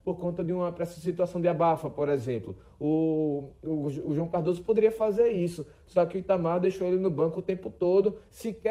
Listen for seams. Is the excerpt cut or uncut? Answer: uncut